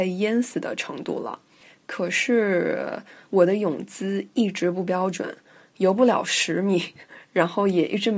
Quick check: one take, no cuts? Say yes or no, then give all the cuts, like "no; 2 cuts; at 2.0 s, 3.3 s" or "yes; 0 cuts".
yes; 0 cuts